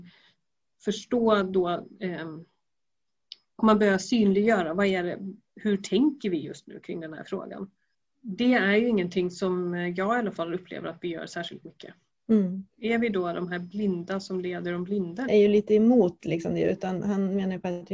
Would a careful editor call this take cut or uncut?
cut